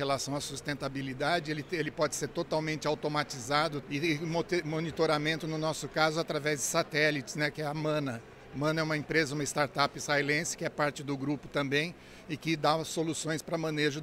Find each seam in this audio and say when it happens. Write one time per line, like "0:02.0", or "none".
0:03.8